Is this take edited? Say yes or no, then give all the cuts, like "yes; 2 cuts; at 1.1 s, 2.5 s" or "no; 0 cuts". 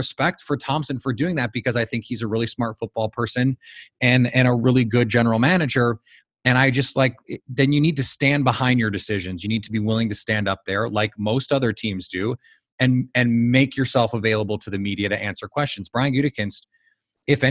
no; 0 cuts